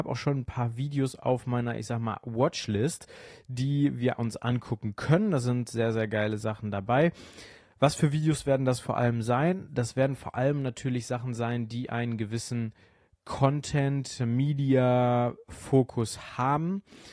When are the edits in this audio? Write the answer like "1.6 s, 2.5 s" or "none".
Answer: none